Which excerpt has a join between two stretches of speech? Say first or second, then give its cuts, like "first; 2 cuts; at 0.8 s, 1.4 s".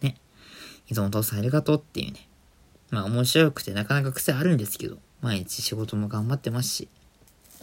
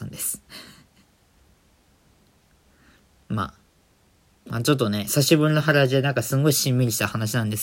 first; 2 cuts; at 2.8 s, 5.1 s